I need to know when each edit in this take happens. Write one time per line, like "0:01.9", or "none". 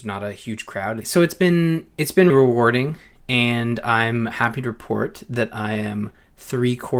0:01.0
0:02.3

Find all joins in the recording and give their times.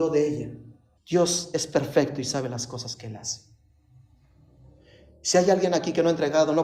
0:01.0

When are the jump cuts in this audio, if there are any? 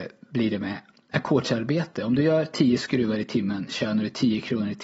none

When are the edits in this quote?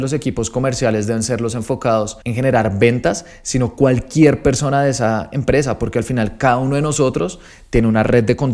0:02.2

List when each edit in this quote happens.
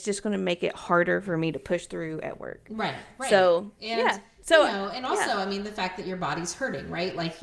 none

